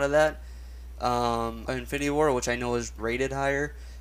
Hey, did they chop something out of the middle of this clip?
yes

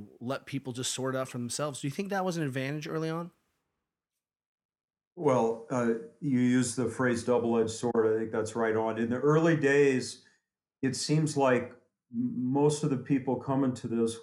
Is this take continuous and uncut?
yes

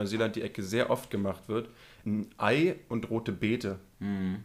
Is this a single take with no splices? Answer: no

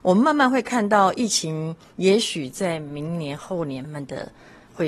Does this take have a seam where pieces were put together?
yes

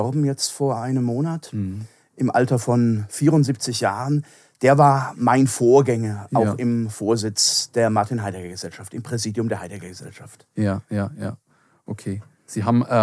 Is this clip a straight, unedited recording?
yes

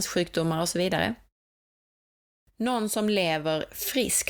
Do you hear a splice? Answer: no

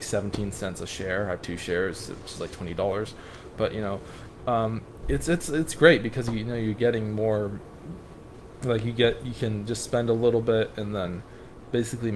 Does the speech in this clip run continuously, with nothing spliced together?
yes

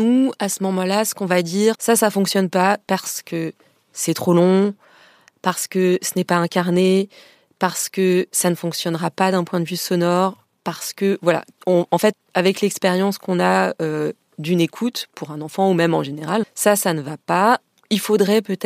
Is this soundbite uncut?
no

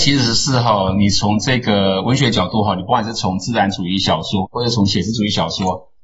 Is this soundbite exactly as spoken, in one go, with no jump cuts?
no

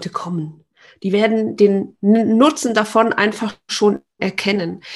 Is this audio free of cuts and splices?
yes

